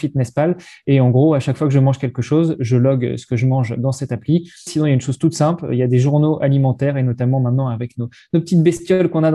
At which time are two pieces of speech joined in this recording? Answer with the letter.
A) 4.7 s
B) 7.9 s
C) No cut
A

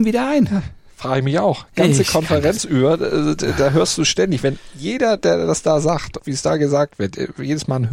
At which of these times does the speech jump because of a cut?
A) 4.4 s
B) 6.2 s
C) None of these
B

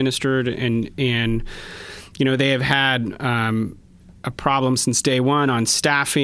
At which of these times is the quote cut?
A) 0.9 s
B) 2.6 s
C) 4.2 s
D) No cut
C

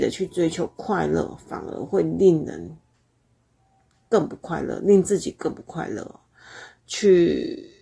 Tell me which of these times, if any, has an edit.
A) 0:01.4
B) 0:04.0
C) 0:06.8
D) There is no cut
C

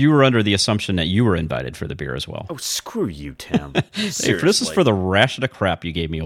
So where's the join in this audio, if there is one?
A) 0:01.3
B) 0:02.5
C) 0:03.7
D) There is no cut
D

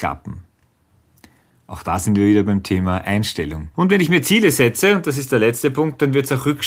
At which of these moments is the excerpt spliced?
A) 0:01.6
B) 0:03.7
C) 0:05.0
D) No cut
B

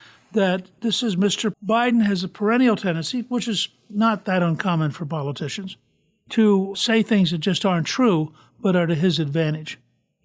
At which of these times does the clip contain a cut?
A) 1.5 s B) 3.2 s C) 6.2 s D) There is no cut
A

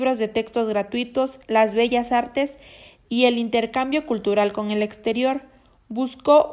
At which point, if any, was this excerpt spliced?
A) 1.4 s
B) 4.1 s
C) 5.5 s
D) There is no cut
A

